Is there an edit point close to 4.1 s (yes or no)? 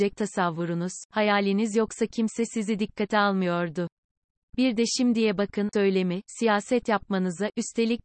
no